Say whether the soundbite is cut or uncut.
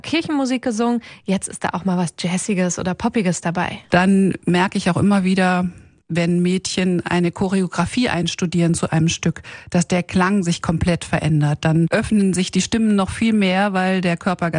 uncut